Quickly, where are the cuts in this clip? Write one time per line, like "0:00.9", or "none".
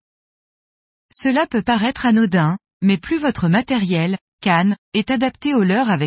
0:04.8

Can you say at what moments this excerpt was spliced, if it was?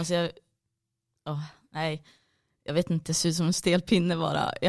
none

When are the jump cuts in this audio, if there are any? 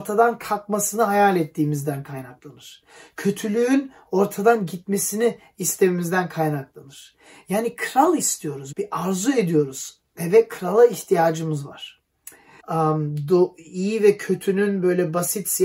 0:08.7
0:12.6

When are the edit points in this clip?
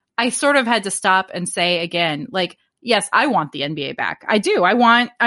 none

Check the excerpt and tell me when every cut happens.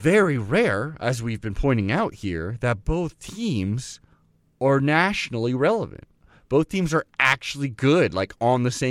none

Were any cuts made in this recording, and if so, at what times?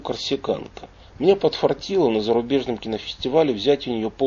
0:01.0

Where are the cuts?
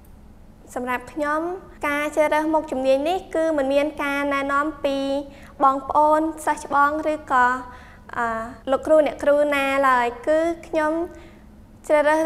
0:01.8
0:08.6

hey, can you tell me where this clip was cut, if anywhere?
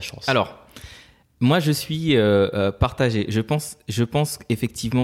none

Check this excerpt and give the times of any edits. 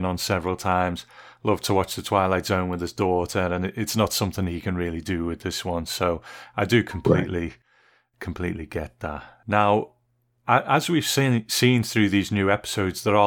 none

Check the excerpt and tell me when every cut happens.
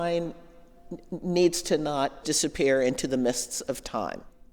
0:02.2

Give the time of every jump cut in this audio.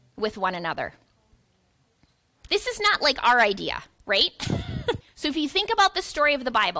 0:02.5
0:05.0

